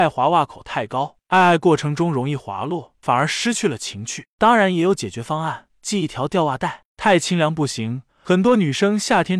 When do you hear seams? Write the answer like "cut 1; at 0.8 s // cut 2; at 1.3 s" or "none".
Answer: cut 1; at 3.0 s

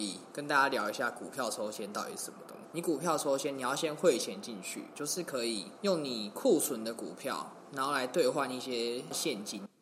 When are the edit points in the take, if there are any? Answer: cut 1; at 2.7 s // cut 2; at 5.0 s

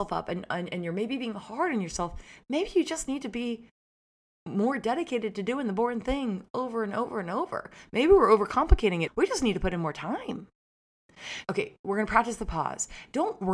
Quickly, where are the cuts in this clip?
cut 1; at 9.1 s // cut 2; at 11.4 s

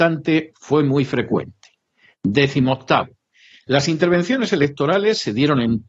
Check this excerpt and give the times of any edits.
none

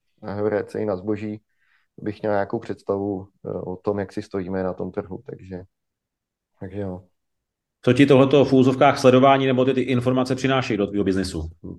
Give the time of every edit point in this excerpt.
none

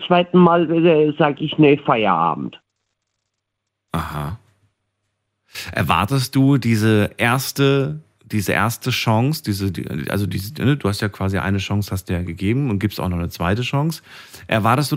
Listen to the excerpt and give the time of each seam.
none

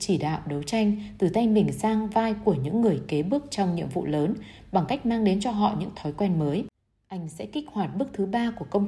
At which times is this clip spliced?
none

